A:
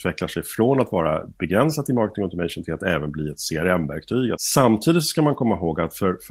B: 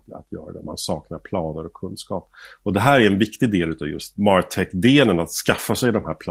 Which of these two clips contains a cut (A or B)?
A